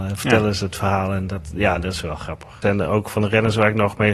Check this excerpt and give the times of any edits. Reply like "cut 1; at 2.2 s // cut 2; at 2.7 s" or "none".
cut 1; at 2.6 s